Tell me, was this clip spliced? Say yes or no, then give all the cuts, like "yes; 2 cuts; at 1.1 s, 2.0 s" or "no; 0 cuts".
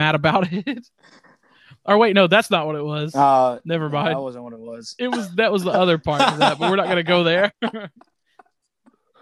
no; 0 cuts